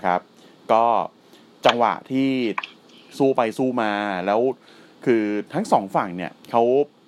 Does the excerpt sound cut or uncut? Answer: uncut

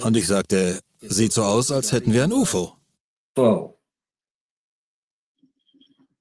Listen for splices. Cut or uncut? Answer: uncut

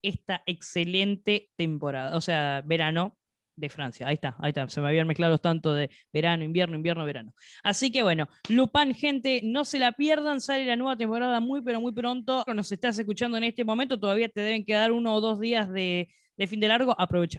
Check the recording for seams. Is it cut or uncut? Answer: cut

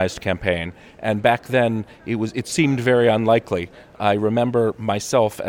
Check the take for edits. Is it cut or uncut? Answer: uncut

